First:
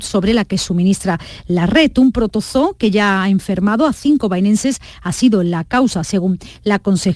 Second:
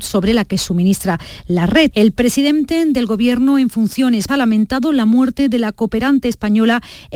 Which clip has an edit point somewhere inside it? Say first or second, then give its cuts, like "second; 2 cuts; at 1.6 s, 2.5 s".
second; 2 cuts; at 1.9 s, 4.3 s